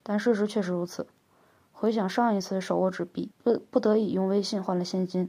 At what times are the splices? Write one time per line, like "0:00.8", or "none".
0:03.3